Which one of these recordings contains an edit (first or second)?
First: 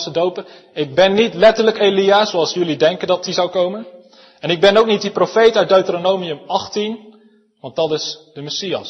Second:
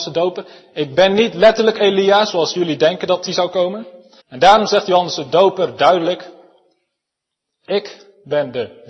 second